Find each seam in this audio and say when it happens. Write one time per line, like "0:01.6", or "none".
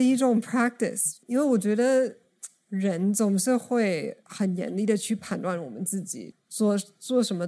0:06.3